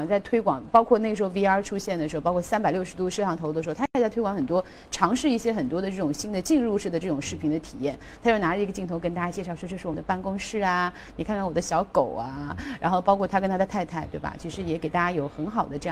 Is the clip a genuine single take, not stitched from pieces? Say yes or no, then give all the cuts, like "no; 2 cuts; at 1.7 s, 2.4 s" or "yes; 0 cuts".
yes; 0 cuts